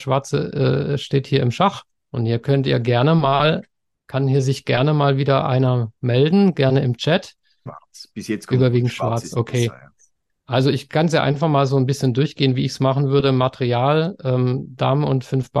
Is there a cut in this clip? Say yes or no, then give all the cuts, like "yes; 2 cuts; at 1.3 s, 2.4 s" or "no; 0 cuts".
yes; 2 cuts; at 2.0 s, 7.7 s